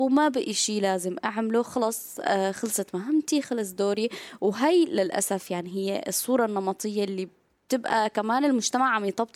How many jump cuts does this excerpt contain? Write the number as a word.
zero